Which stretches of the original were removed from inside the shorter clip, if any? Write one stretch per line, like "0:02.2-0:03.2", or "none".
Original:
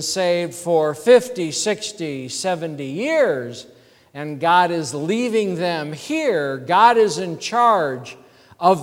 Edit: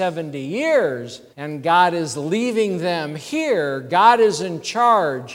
0:03.8-0:04.1